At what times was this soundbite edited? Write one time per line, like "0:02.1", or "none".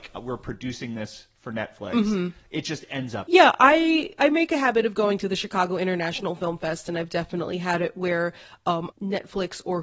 0:08.9